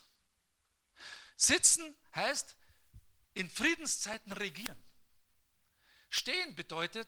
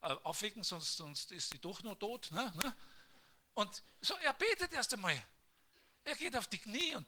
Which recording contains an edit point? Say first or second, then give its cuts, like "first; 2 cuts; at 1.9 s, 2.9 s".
second; 1 cut; at 2.5 s